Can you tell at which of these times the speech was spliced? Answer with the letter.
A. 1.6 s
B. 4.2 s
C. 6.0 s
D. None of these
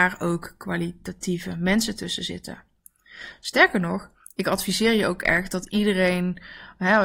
D